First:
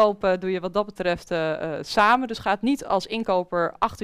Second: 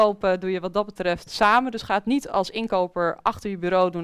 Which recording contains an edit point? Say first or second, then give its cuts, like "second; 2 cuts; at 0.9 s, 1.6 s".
second; 1 cut; at 1.3 s